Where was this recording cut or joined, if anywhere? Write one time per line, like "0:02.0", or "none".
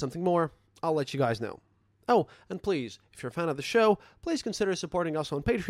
none